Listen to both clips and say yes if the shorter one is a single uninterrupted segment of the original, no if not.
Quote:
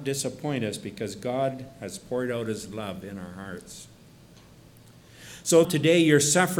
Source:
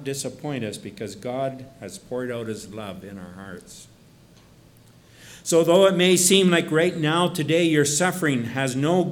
no